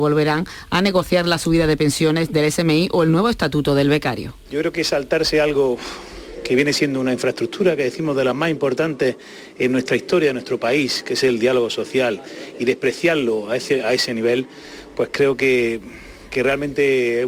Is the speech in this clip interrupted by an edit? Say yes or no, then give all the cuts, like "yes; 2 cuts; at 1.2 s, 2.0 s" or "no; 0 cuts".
no; 0 cuts